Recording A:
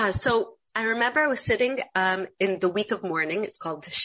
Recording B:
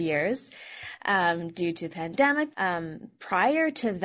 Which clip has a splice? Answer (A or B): B